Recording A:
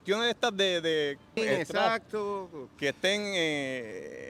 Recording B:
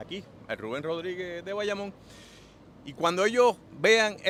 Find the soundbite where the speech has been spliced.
A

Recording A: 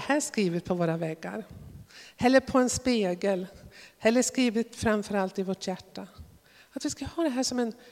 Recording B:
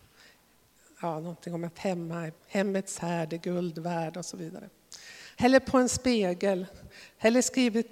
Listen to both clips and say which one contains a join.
B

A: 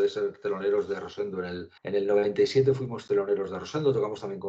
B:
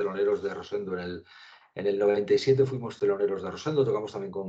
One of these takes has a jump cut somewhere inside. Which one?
A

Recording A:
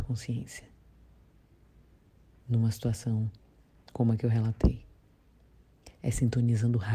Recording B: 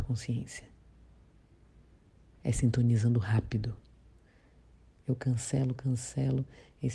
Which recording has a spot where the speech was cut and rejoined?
B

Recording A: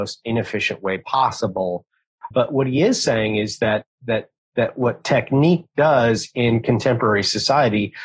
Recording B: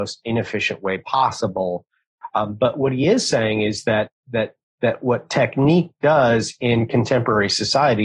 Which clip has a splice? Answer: A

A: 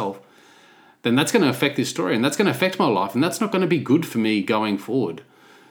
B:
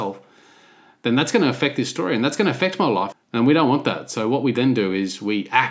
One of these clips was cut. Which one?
B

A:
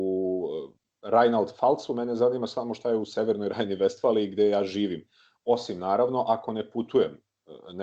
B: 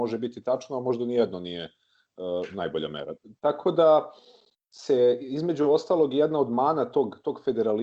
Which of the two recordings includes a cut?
B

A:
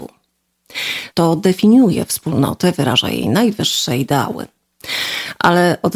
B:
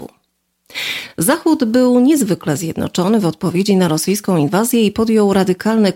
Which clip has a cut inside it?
A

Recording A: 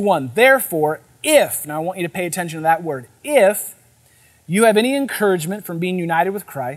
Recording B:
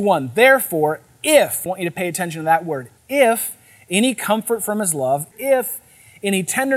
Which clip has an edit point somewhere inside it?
B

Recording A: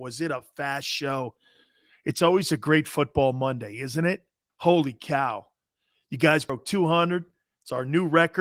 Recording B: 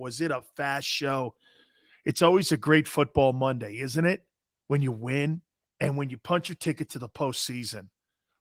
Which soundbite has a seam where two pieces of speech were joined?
A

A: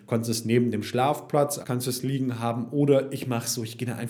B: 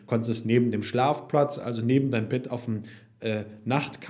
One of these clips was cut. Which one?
A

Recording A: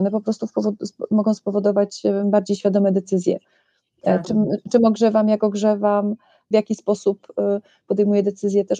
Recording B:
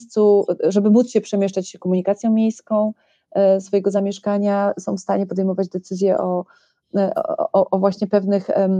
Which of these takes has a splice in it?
A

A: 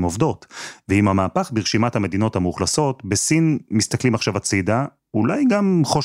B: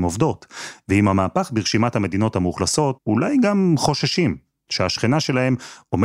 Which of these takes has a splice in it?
B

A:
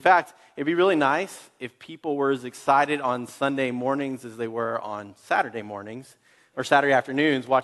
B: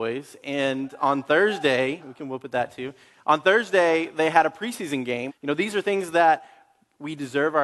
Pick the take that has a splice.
B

